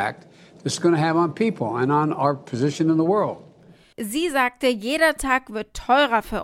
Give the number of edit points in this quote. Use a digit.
1